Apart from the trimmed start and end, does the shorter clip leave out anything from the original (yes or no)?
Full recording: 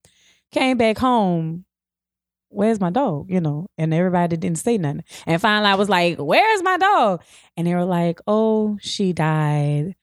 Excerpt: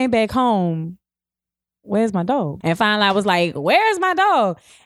yes